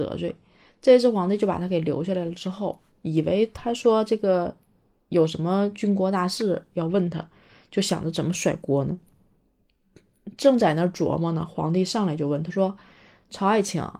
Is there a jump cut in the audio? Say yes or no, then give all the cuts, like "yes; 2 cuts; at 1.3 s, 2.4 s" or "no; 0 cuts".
no; 0 cuts